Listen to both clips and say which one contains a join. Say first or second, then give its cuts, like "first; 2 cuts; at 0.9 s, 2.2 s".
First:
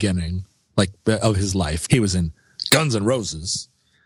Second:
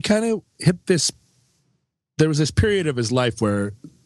first; 1 cut; at 1.9 s